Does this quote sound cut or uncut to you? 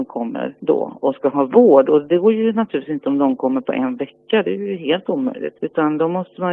uncut